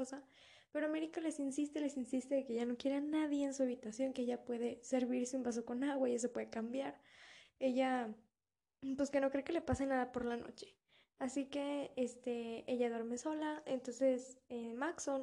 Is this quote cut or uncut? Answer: uncut